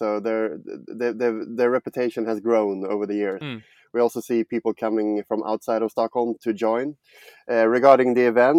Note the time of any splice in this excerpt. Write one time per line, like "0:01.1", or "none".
0:03.4
0:06.4